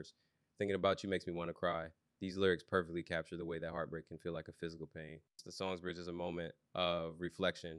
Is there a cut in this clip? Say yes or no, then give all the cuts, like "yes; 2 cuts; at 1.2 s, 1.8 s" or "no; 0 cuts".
yes; 1 cut; at 2.2 s